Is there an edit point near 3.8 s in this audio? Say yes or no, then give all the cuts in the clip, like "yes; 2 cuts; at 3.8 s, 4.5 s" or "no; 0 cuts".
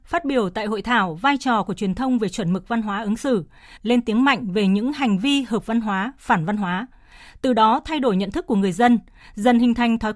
yes; 1 cut; at 3.8 s